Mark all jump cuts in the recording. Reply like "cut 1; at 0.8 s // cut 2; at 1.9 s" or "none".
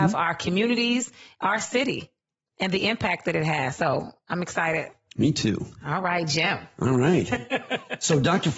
none